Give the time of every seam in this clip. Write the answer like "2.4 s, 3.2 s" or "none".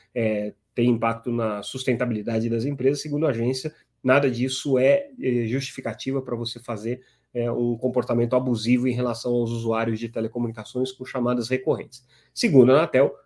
none

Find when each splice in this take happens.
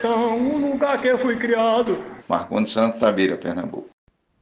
2.2 s

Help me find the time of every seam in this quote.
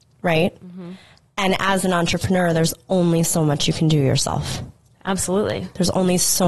none

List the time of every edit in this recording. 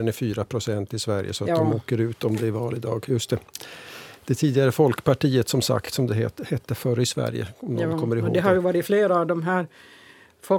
none

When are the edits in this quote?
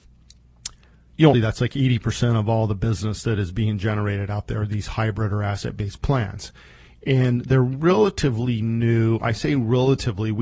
1.3 s

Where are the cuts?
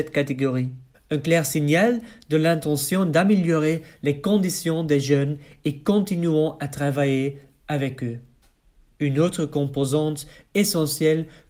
0.9 s

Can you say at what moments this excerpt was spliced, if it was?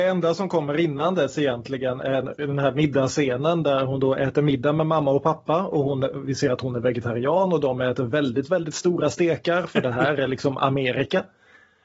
none

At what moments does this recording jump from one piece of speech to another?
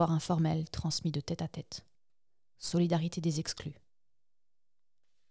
none

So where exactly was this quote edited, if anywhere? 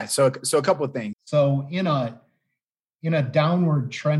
1.1 s

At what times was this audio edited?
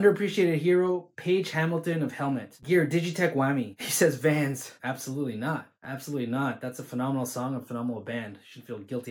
3.8 s, 4.8 s

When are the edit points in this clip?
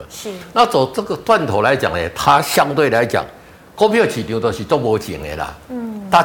none

